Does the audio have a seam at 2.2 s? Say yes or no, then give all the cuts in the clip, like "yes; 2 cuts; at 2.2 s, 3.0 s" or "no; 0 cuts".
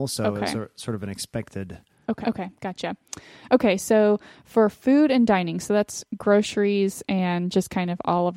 yes; 1 cut; at 2.2 s